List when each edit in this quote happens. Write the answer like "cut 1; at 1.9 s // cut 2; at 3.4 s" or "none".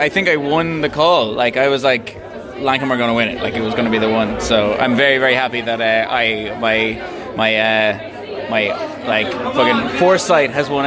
none

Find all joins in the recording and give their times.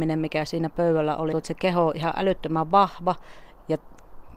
cut 1; at 1.3 s

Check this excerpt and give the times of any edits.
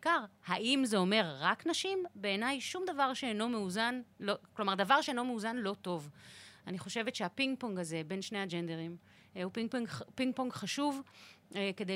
none

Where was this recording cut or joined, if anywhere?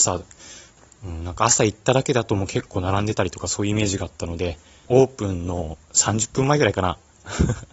cut 1; at 4.8 s

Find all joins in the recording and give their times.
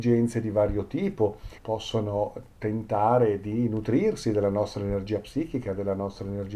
cut 1; at 1.6 s

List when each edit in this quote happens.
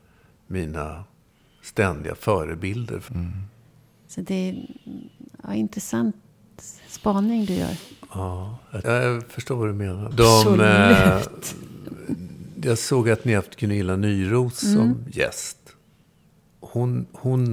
cut 1; at 3.1 s // cut 2; at 8.8 s // cut 3; at 10.1 s

